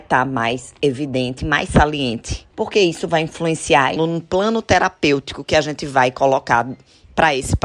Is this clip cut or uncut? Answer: cut